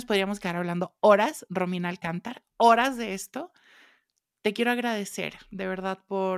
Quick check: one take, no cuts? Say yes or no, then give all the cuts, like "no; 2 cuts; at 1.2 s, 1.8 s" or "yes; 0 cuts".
yes; 0 cuts